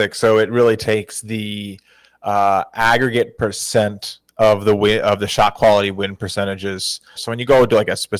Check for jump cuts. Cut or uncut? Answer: cut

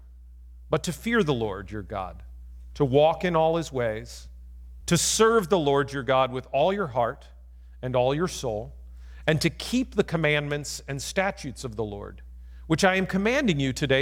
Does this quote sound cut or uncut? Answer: cut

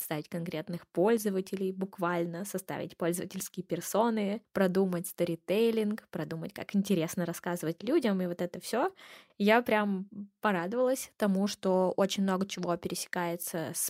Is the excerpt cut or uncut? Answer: cut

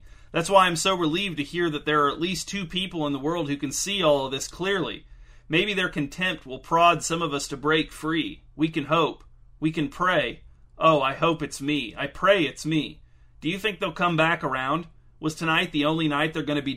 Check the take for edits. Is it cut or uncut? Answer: uncut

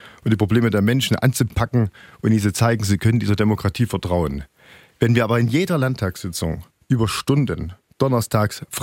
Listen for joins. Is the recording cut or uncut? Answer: uncut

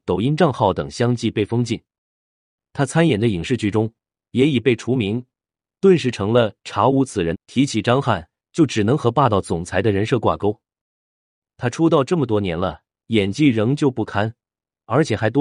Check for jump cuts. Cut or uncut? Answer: cut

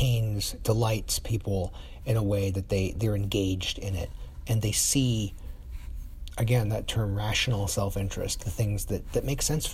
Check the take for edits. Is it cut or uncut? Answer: uncut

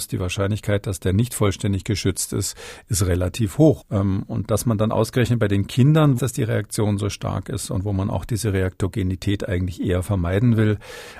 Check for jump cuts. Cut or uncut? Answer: cut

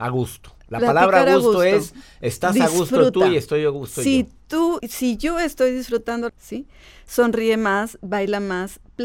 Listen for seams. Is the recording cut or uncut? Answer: cut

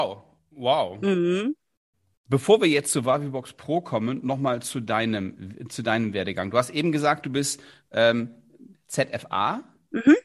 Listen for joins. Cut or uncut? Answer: cut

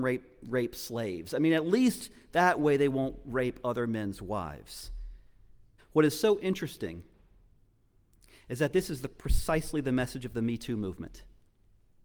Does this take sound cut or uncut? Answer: cut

